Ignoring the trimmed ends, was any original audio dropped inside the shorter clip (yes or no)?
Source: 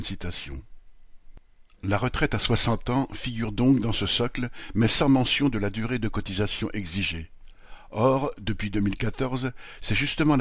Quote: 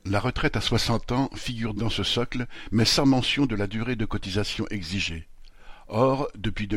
yes